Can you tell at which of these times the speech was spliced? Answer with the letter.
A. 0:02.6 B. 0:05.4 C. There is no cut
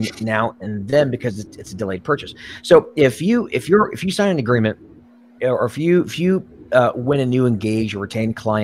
B